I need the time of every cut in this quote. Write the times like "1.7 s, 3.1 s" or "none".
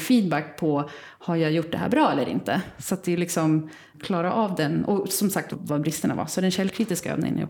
3.9 s, 5.5 s